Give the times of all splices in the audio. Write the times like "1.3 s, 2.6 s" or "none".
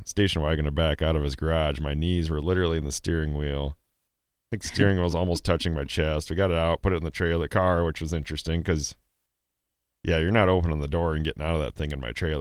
none